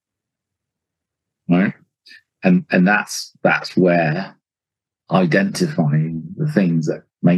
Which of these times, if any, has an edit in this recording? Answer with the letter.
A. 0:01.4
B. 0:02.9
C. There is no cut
C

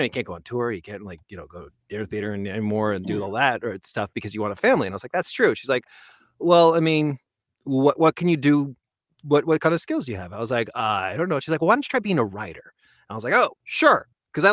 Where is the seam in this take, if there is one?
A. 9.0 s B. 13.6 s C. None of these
B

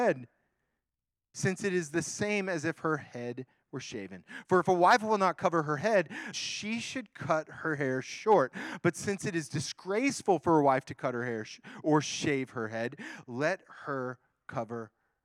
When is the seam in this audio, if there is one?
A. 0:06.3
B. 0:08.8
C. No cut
A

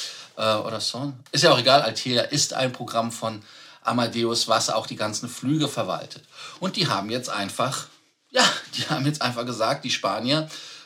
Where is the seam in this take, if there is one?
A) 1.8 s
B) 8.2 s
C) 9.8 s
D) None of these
A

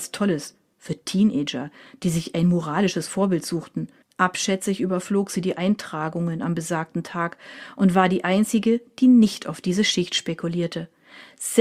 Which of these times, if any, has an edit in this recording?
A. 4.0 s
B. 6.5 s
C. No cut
A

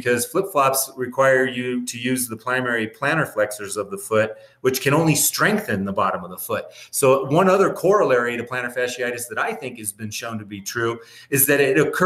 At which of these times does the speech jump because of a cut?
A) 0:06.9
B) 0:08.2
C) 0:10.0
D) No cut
D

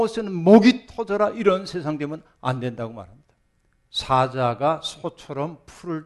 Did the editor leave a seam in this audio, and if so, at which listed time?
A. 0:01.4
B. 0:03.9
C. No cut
B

